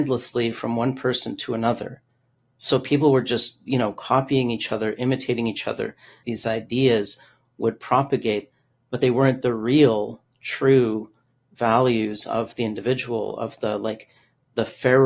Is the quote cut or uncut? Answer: cut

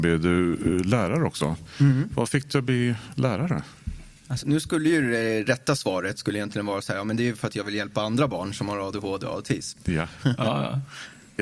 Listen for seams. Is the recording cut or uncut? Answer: cut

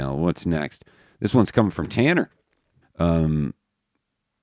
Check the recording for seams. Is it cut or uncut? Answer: cut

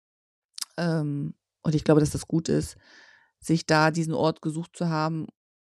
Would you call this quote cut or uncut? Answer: uncut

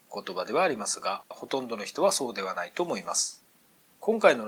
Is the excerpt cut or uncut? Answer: cut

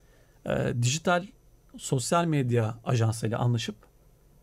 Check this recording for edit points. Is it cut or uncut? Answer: uncut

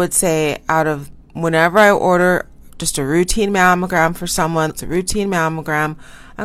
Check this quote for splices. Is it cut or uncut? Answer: cut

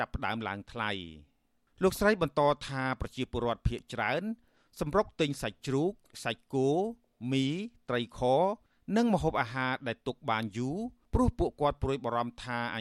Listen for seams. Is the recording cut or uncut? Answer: uncut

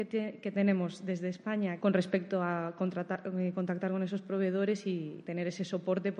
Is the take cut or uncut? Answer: cut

